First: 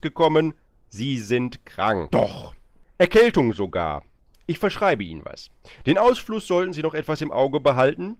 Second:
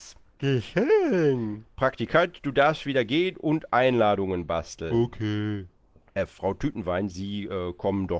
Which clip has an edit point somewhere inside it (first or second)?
first